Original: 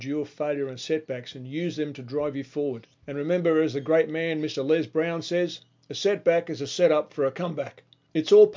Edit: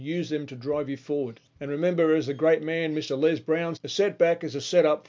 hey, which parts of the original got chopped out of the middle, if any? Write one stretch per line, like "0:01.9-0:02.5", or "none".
0:05.2-0:05.8